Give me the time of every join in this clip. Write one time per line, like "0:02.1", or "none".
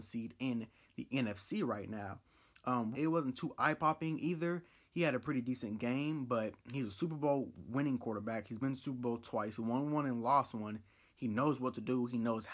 0:02.9